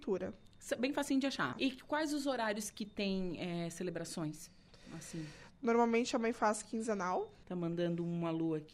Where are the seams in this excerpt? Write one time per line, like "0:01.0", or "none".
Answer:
0:01.5
0:07.4

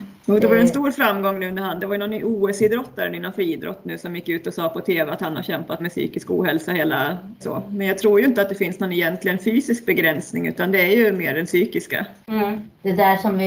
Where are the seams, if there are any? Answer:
0:05.8
0:07.4

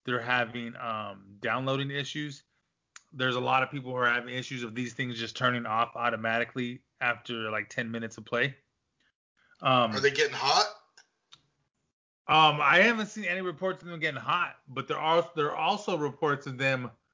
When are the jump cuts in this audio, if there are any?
none

